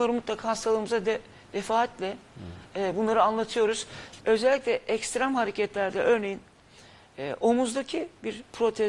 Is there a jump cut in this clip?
yes; 1 cut; at 4.2 s

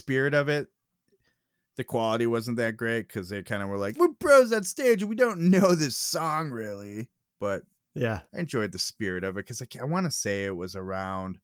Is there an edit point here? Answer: yes; 2 cuts; at 3.9 s, 8.3 s

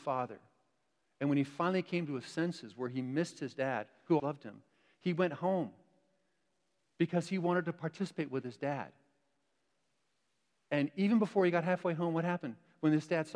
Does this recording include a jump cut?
yes; 1 cut; at 4.2 s

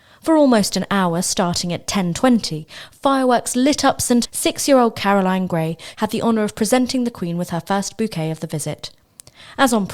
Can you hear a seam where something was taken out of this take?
yes; 2 cuts; at 4.3 s, 5.9 s

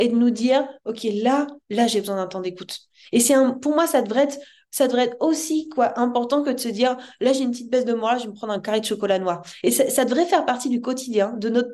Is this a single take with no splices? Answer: yes; 0 cuts

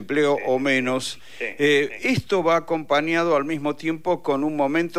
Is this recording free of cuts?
yes; 0 cuts

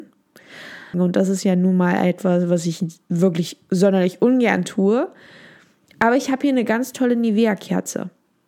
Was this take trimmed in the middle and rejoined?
yes; 1 cut; at 0.9 s

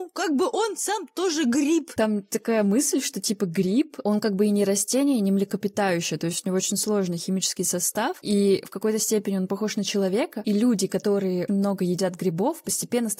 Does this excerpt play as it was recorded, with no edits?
no; 1 cut; at 11.5 s

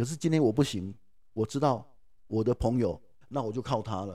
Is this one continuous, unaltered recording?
no; 1 cut; at 3.2 s

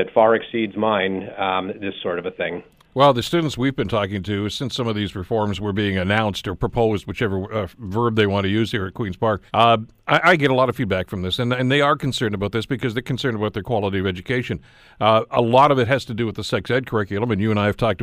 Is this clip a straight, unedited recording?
no; 1 cut; at 9.5 s

